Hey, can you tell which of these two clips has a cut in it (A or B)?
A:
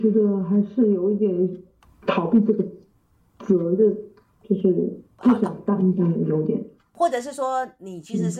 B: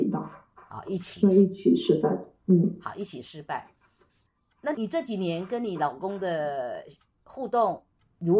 B